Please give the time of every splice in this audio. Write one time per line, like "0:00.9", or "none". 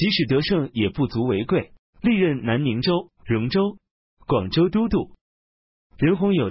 0:01.8
0:03.2